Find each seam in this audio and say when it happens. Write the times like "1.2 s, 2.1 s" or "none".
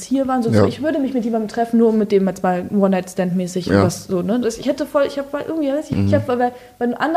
4.4 s, 5.9 s

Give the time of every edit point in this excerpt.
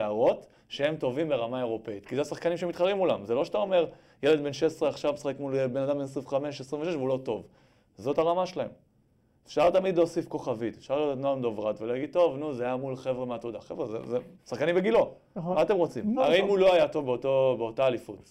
14.4 s, 16.2 s

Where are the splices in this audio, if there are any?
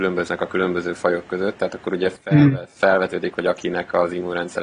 none

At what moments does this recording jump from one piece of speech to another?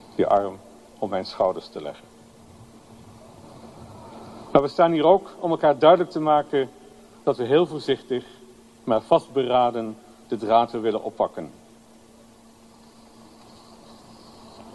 none

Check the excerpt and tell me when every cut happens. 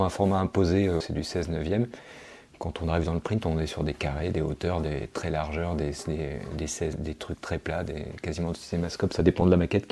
1.0 s

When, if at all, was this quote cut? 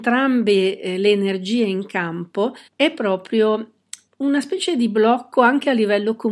2.7 s, 4.1 s

